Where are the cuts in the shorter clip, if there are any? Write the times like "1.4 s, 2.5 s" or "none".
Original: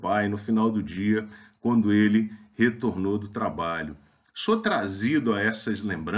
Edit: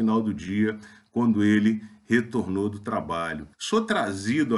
3.5 s

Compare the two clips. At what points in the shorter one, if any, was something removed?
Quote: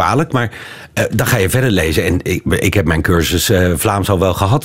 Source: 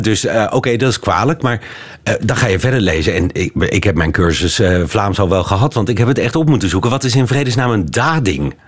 none

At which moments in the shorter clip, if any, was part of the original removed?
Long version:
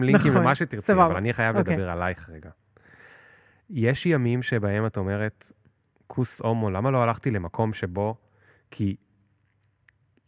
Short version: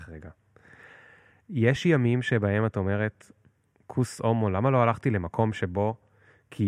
none

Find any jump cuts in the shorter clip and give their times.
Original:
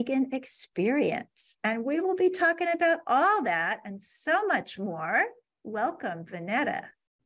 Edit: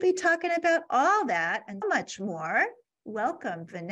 1.8 s

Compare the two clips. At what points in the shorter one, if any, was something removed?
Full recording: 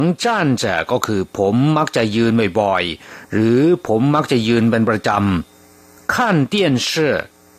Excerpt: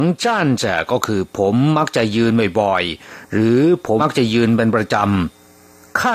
4.0 s

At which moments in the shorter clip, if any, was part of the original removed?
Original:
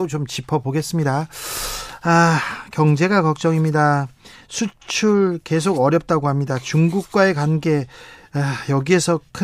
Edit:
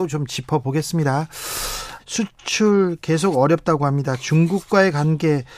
2.0 s

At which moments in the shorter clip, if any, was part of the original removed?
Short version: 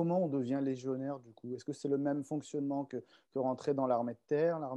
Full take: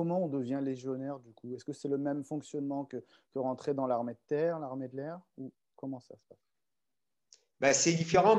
none

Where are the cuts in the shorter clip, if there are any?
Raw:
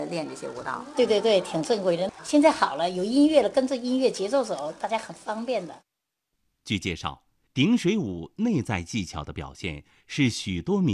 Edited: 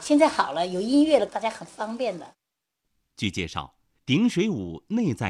1.3 s

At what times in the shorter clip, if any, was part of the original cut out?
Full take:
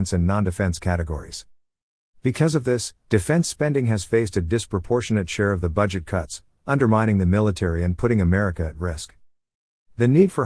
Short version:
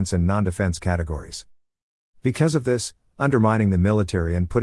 3.1 s

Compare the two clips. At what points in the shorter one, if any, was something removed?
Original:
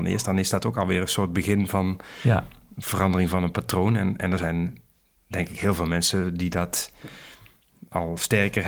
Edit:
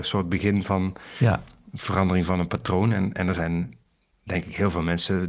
none

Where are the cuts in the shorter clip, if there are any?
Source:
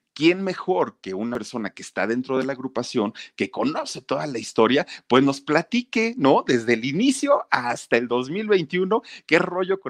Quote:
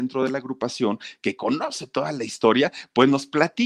none

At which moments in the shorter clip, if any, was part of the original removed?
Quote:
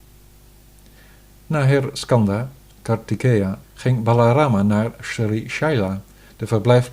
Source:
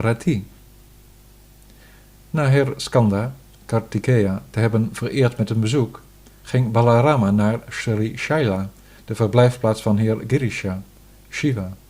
3.6 s

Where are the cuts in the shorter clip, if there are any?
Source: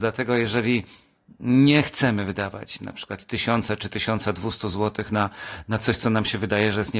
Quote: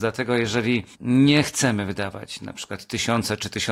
0.9 s

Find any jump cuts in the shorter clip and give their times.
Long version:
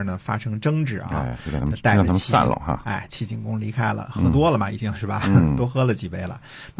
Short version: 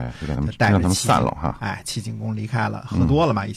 none

